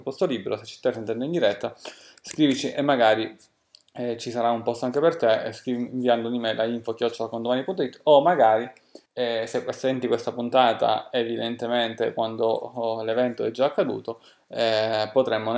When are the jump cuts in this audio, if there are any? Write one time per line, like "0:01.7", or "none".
0:09.1